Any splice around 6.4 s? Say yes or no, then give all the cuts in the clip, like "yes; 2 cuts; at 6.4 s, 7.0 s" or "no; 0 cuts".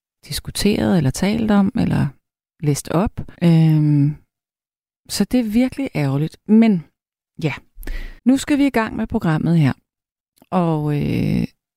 no; 3 cuts; at 3.3 s, 8.2 s, 10.4 s